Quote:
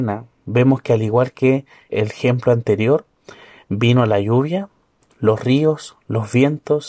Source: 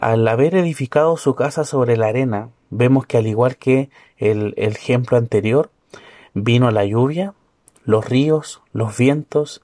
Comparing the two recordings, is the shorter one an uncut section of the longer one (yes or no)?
no